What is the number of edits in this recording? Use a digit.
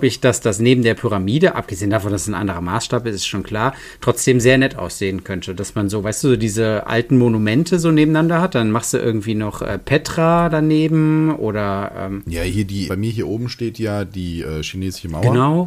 1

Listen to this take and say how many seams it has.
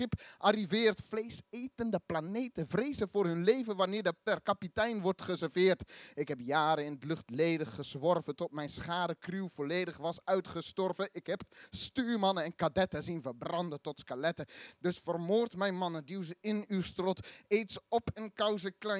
1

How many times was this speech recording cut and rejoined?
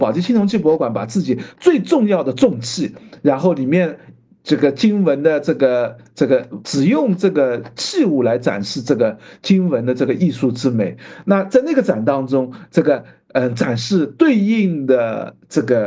1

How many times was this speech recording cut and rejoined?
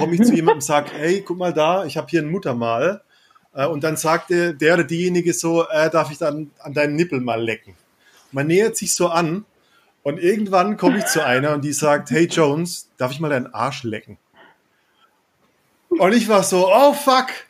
0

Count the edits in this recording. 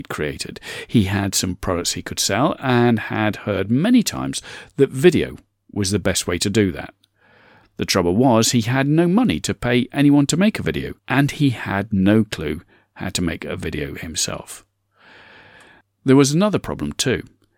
1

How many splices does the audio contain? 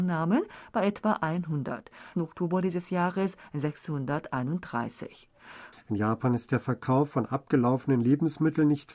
2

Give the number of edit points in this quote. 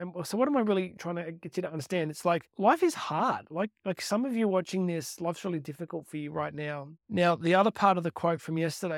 1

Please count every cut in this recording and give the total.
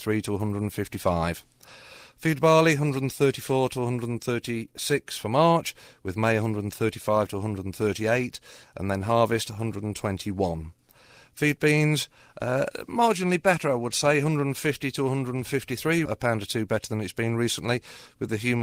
1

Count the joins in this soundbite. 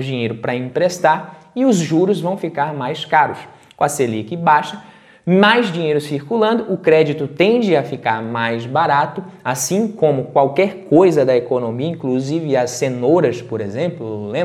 0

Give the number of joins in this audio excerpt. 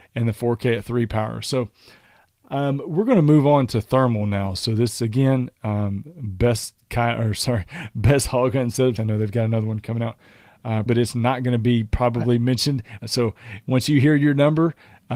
3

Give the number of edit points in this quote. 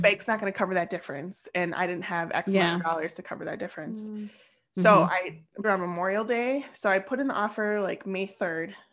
1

